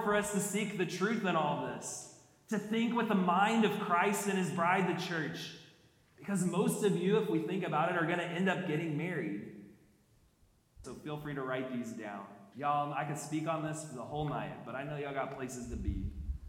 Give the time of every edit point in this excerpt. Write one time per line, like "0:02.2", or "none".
0:10.8
0:12.5